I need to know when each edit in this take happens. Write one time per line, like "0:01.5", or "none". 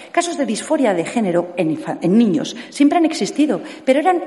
none